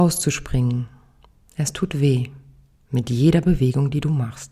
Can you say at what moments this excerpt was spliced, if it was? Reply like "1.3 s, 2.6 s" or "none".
none